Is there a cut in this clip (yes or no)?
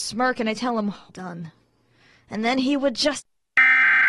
yes